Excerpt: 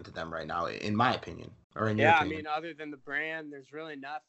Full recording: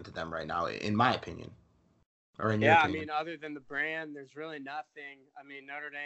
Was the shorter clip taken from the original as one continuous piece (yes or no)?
no